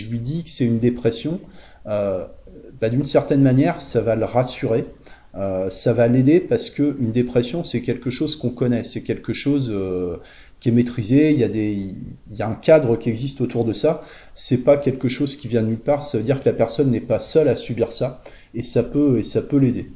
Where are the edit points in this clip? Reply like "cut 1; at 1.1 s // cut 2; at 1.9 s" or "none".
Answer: none